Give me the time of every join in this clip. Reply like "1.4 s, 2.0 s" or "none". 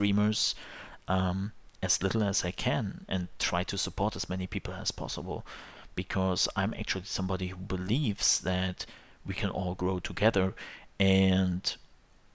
none